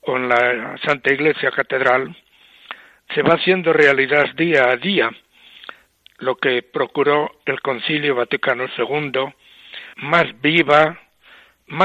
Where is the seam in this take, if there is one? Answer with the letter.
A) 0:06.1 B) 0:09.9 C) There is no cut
B